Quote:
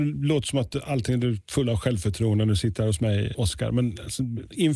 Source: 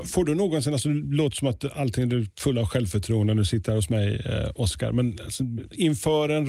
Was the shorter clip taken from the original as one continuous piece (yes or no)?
no